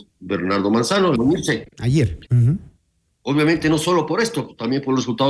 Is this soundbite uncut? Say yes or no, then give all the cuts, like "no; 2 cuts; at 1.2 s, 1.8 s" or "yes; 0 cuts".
no; 2 cuts; at 1.1 s, 2.3 s